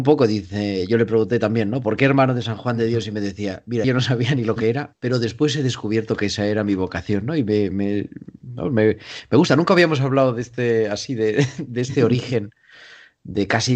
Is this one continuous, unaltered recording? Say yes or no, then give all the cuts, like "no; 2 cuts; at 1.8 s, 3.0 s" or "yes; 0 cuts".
no; 1 cut; at 3.8 s